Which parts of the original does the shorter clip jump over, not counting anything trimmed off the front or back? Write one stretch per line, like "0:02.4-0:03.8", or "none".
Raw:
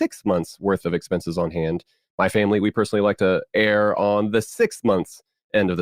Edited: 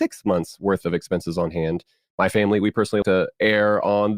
0:03.0-0:03.2